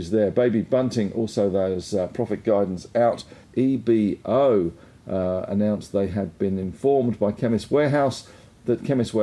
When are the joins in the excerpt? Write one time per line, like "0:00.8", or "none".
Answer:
0:03.4